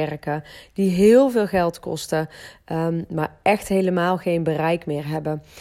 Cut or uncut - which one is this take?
uncut